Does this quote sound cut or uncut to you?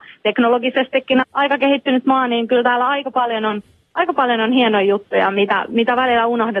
cut